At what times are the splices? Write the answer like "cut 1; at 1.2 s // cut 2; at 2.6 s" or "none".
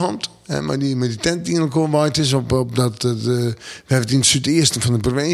none